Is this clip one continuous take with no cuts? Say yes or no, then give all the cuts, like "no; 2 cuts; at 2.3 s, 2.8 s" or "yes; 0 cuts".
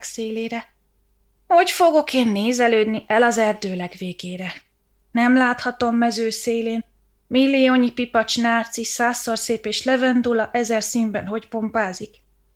yes; 0 cuts